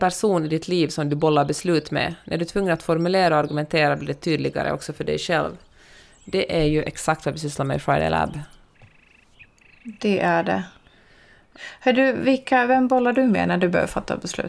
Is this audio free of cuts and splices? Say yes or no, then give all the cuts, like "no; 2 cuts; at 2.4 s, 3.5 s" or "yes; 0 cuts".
yes; 0 cuts